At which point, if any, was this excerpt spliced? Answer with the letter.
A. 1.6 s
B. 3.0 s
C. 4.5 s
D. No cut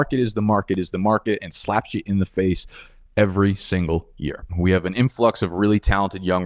C